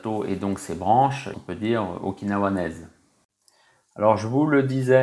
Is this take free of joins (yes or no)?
no